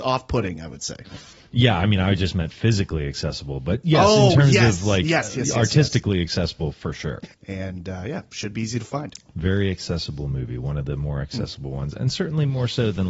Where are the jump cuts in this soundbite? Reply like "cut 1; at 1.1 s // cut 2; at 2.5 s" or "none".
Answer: cut 1; at 7.3 s